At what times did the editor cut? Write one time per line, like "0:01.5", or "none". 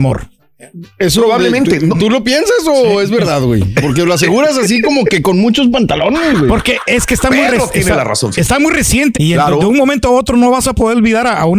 0:09.1